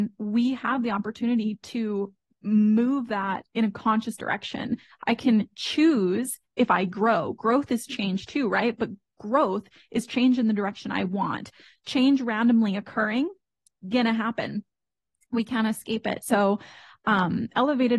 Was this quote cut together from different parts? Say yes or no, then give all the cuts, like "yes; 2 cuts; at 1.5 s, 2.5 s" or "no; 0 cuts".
no; 0 cuts